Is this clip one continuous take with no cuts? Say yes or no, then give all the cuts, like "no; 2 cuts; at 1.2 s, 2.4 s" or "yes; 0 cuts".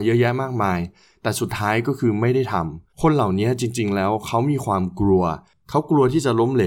no; 1 cut; at 2.9 s